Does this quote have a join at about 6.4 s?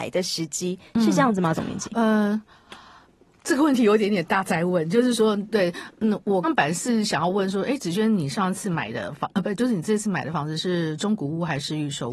yes; 1 cut; at 6.4 s

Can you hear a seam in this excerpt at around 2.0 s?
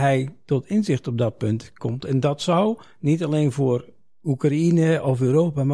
no; 0 cuts

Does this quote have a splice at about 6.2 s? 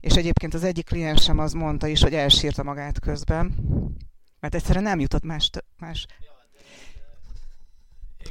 yes; 1 cut; at 6.2 s

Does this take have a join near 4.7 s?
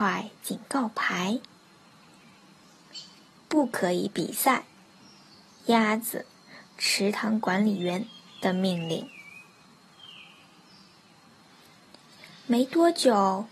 no; 0 cuts

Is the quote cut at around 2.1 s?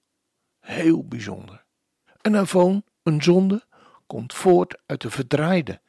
yes; 1 cut; at 2.1 s

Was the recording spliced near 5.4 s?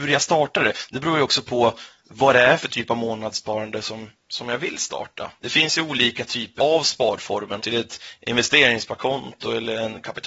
yes; 3 cuts; at 5.4 s, 6.6 s, 7.6 s

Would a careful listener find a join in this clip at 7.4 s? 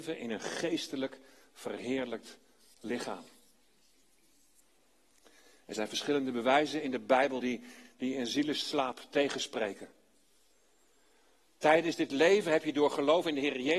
no; 0 cuts

